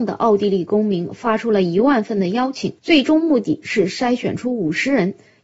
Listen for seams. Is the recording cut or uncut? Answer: cut